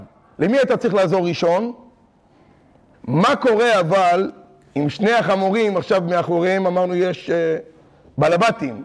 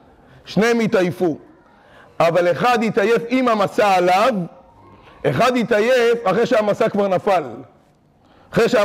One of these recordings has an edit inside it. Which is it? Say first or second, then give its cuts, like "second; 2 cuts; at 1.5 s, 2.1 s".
first; 1 cut; at 2.9 s